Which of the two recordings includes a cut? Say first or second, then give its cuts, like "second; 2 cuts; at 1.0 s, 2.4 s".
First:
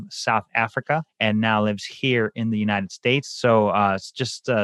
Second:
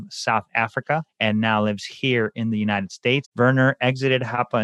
second; 1 cut; at 3.2 s